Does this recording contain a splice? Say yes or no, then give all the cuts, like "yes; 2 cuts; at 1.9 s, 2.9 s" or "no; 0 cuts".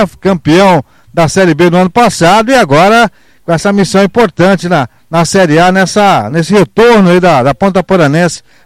no; 0 cuts